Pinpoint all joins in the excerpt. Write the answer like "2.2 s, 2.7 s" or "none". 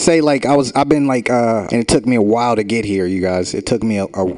1.7 s